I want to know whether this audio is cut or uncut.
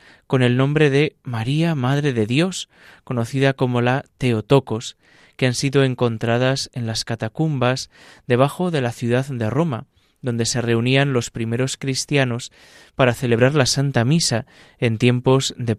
uncut